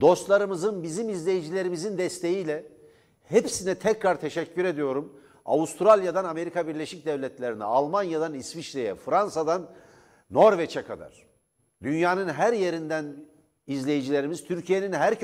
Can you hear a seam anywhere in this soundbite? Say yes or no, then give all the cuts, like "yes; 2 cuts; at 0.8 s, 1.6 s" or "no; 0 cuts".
no; 0 cuts